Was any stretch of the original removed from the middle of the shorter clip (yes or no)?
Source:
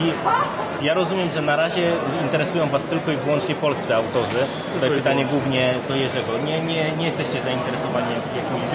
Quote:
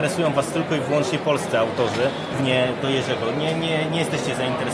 yes